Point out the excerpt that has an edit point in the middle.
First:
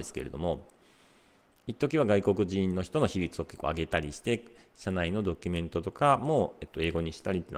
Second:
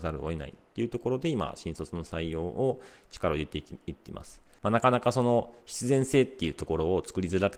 second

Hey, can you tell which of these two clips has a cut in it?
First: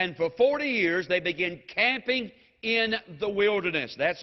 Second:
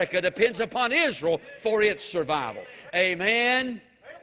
second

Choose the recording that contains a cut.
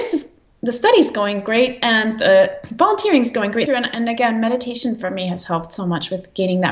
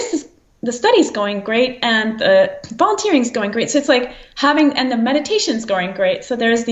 first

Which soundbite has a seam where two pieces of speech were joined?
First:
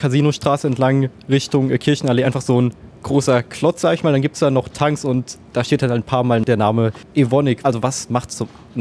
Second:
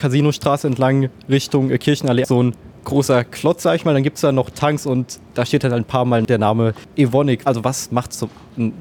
second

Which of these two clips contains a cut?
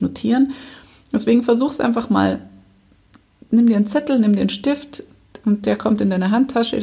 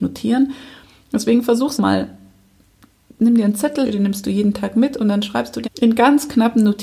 second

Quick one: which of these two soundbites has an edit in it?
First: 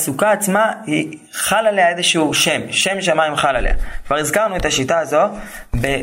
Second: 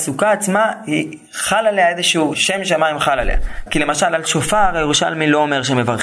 second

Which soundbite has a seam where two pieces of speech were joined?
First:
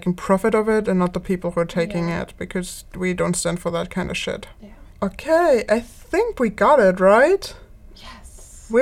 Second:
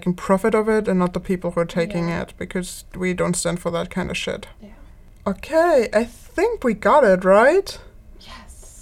first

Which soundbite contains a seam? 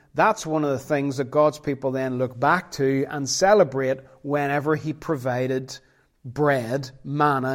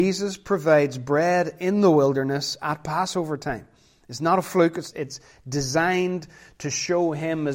second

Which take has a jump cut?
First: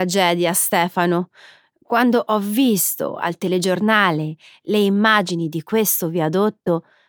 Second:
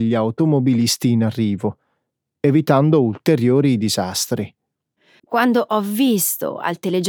second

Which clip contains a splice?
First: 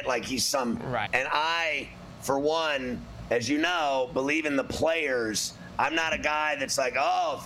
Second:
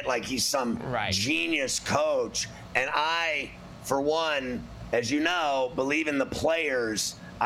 first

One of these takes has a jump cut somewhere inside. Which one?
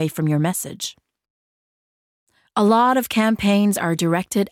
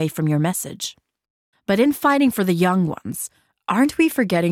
second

